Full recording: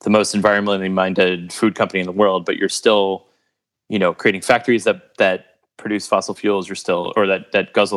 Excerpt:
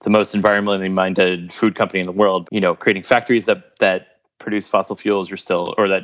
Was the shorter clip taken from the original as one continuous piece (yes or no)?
no